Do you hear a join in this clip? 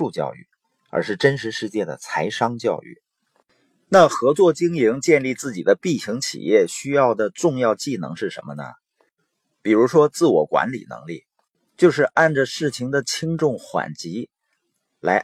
no; 0 cuts

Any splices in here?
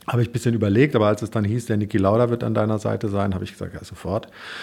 no; 0 cuts

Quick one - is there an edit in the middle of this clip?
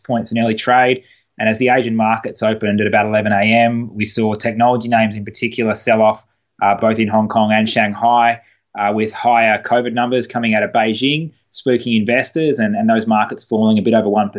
no; 0 cuts

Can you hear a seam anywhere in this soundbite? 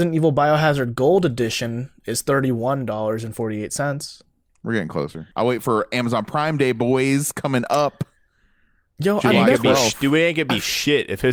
yes; 1 cut; at 5.3 s

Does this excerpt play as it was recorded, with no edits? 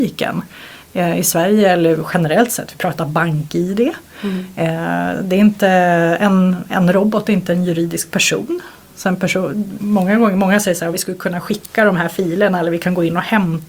no; 2 cuts; at 9.8 s, 10.9 s

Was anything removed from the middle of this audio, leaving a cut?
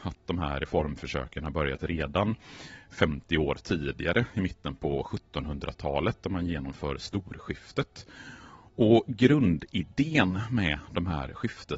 no; 0 cuts

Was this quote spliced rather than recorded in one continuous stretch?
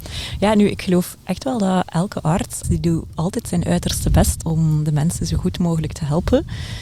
yes; 2 cuts; at 2.6 s, 4.4 s

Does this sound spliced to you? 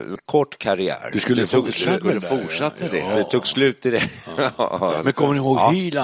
no; 0 cuts

